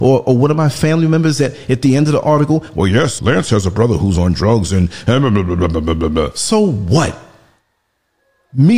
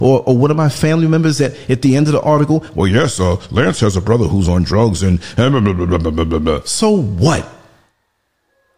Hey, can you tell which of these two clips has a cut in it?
first; 1 cut; at 3.2 s

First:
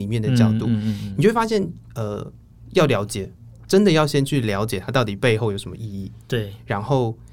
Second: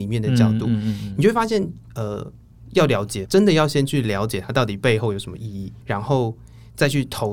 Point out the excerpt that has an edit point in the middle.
second; 2 cuts; at 3.2 s, 5.8 s

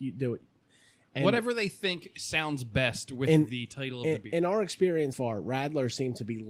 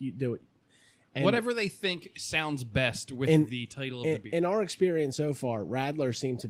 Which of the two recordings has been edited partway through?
first; 1 cut; at 5.1 s

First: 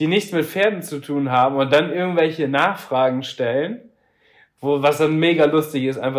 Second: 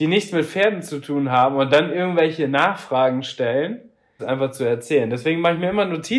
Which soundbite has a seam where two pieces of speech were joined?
second; 1 cut; at 4.2 s

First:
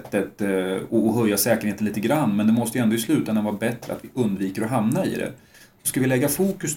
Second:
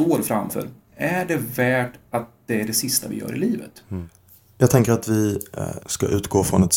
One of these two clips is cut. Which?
second; 1 cut; at 5.8 s

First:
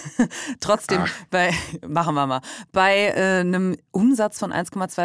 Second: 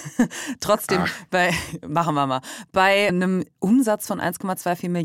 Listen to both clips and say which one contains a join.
second; 1 cut; at 3.1 s

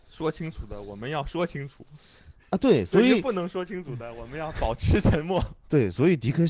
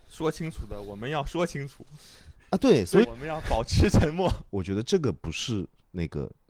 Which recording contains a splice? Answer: second; 2 cuts; at 3.0 s, 4.5 s

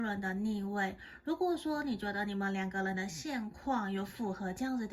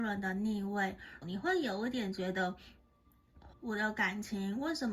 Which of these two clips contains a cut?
second; 2 cuts; at 1.2 s, 3.5 s

